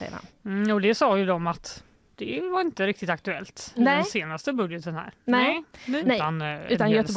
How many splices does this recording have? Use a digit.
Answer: 1